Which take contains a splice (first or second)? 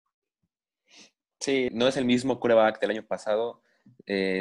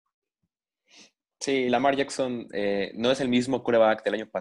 first